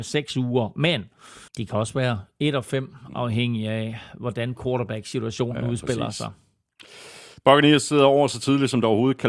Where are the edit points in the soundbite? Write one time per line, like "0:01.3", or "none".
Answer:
0:01.5